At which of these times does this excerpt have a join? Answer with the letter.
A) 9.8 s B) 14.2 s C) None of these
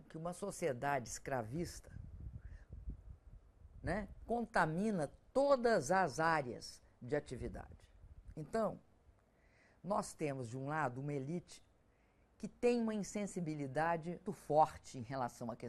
B